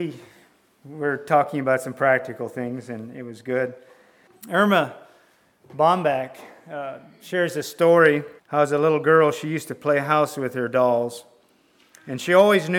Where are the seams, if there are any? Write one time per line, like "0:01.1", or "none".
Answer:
0:04.3
0:08.4